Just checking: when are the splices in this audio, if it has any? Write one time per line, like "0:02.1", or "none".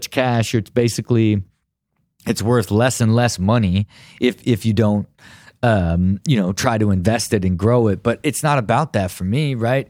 none